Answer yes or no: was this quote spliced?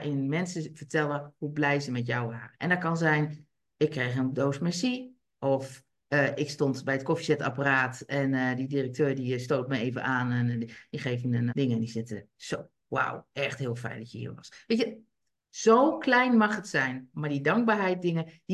yes